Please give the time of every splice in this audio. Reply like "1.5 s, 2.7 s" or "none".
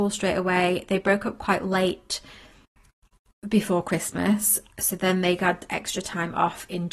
none